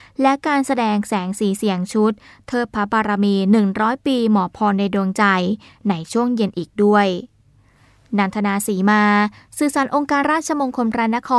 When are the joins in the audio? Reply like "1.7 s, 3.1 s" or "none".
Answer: 10.2 s